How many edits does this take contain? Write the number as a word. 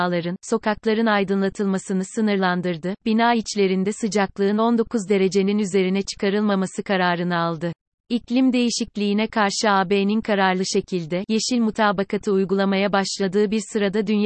one